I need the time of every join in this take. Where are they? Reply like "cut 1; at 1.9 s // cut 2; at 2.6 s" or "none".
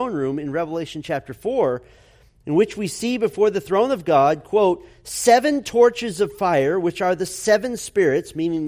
none

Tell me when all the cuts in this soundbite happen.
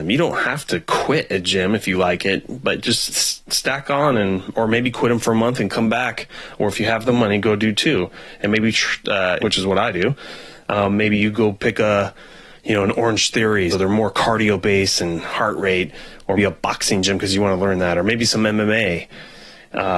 cut 1; at 9.4 s // cut 2; at 13.7 s // cut 3; at 16.4 s

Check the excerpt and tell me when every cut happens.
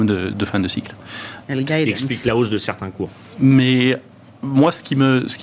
cut 1; at 1.4 s

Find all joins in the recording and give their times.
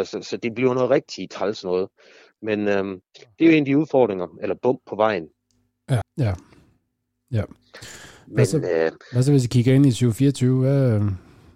cut 1; at 6.0 s

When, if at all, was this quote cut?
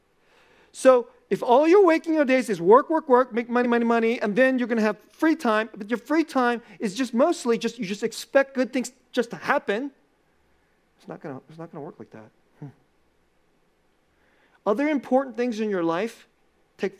none

